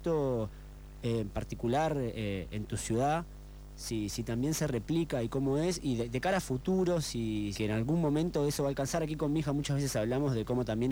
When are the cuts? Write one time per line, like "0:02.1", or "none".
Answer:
0:07.5